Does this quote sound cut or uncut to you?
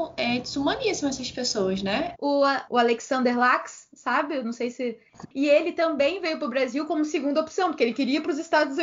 cut